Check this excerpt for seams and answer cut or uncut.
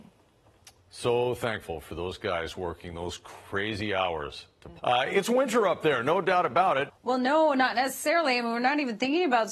cut